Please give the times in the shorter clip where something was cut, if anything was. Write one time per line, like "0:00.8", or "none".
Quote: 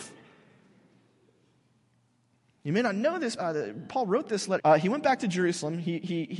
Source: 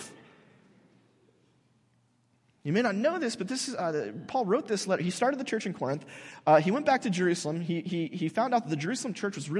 0:03.4
0:04.6